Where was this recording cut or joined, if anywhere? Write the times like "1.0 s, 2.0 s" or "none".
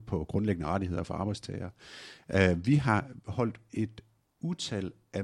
none